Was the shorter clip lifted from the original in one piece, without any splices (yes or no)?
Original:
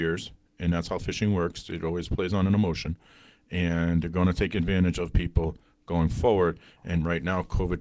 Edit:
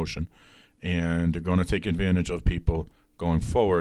yes